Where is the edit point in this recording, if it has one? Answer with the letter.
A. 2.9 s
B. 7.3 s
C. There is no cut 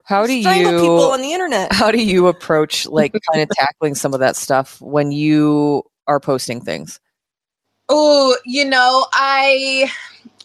C